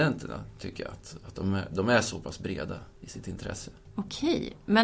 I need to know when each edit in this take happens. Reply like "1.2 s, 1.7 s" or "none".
none